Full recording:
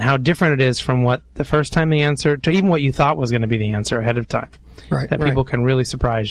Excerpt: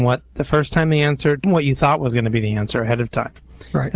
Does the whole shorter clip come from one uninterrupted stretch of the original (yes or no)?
no